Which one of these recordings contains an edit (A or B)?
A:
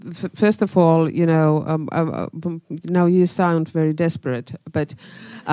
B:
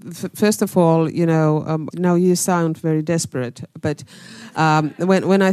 B